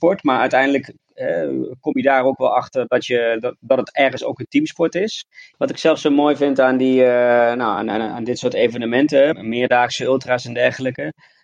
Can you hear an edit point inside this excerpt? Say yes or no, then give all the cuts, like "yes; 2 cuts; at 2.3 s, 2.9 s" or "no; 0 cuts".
yes; 2 cuts; at 5.5 s, 9.3 s